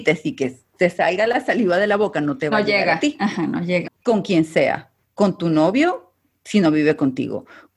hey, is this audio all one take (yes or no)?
no